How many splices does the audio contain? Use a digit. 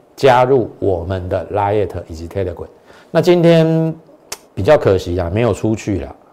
2